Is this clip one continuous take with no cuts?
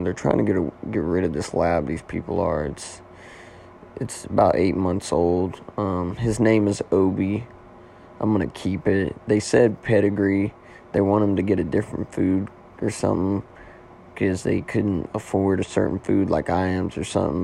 yes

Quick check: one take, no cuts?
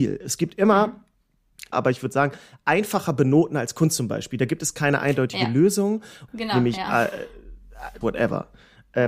no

